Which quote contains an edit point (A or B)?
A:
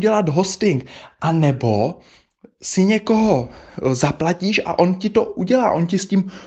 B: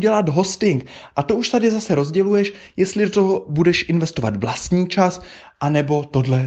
B